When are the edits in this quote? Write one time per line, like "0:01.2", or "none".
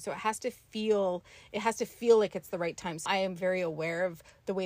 0:03.1